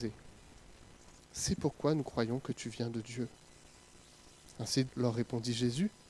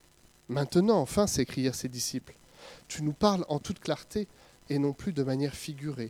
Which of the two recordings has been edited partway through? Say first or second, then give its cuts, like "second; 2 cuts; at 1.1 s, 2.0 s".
first; 1 cut; at 4.9 s